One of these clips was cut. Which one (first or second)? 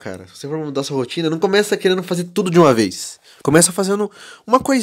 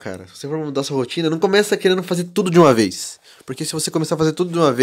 first